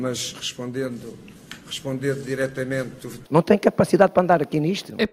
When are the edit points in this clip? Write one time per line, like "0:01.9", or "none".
0:03.2